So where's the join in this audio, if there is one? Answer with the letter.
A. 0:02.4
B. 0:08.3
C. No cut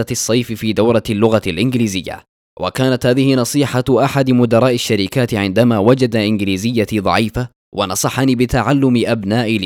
A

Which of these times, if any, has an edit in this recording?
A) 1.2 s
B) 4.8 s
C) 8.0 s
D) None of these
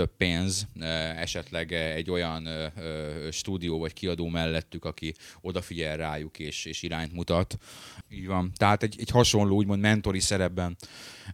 C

